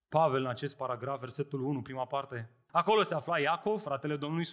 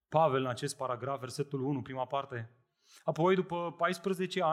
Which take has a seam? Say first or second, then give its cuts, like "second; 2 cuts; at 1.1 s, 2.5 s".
first; 1 cut; at 2.7 s